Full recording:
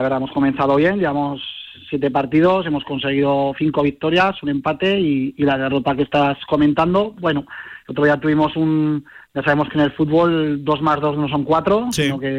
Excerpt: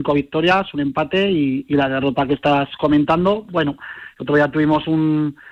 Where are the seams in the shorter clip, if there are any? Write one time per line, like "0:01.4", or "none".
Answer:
none